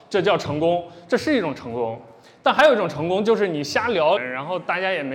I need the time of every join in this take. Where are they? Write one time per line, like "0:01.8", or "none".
0:04.2